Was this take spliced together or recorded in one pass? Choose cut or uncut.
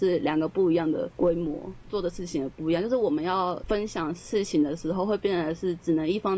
cut